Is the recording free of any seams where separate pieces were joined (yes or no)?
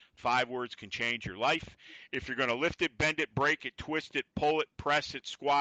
yes